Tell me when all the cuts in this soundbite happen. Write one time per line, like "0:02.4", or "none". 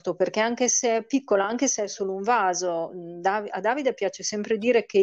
none